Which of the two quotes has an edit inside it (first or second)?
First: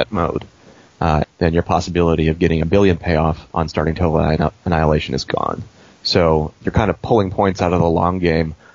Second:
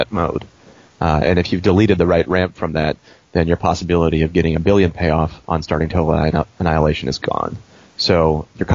first